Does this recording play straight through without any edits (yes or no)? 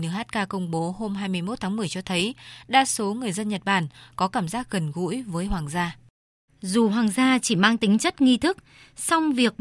no